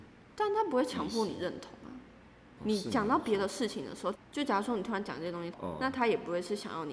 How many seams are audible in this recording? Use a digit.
3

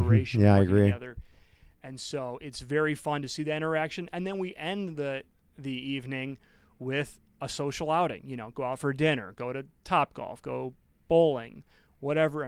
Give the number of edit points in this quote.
0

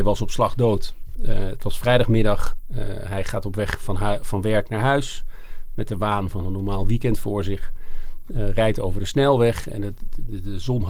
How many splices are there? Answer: 1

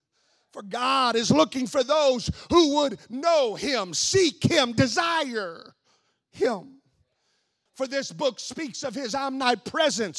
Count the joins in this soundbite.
1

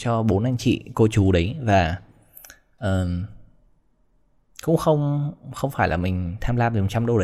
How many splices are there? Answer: 0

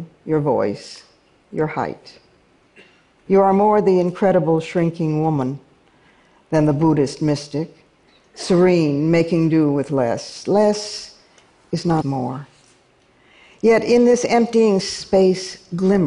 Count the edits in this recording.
2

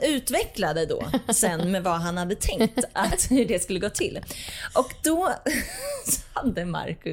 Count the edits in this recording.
0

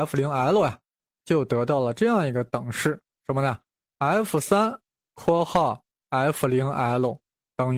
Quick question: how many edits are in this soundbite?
1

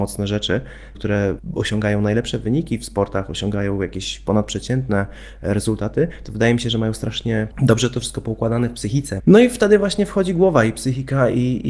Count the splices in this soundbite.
2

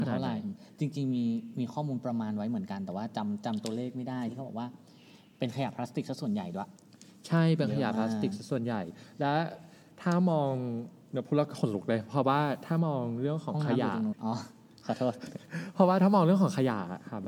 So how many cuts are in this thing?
1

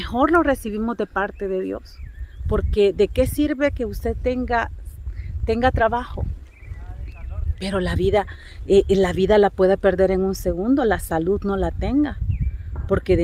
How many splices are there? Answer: 0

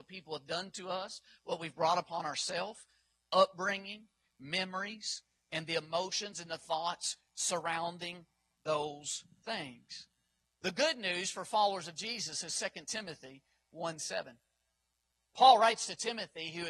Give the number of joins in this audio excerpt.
0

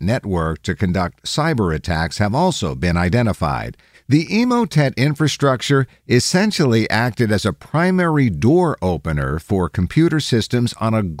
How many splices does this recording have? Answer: 1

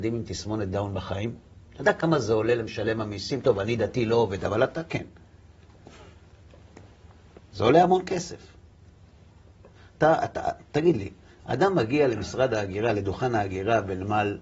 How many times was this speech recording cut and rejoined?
0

